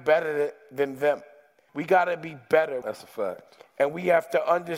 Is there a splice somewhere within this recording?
yes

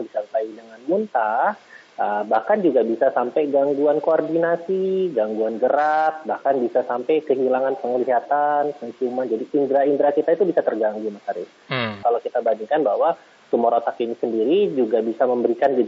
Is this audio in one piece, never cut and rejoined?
no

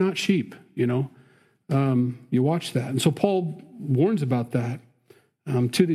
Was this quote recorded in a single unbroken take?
yes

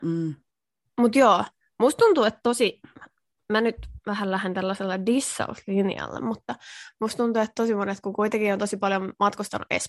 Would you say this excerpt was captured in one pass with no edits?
yes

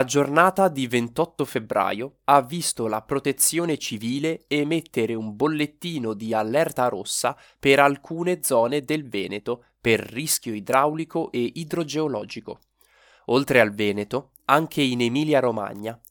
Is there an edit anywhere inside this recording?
no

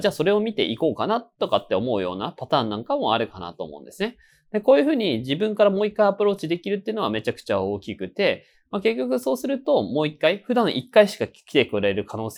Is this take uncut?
yes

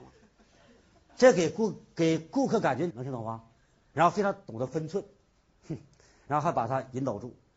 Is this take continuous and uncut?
no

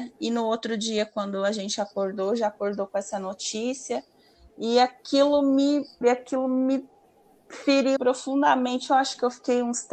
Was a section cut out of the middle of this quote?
yes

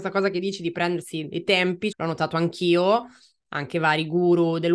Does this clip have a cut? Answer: yes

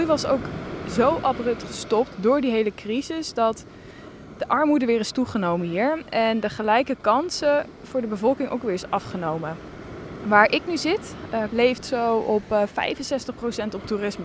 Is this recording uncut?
no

